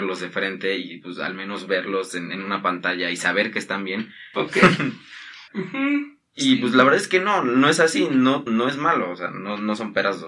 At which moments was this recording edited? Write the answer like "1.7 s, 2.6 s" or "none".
4.3 s, 5.5 s, 8.5 s